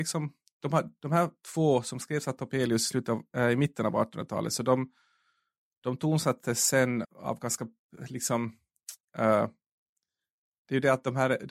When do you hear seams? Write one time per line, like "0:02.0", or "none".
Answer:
0:07.0